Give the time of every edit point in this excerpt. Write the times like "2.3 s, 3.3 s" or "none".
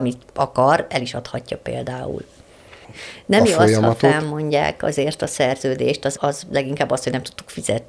2.8 s, 6.2 s